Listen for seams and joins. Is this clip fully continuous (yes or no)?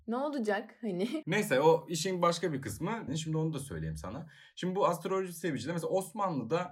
no